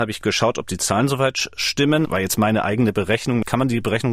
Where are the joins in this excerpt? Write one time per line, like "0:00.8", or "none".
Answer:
0:02.0